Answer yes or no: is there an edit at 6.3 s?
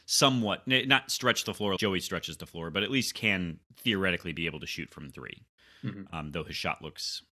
no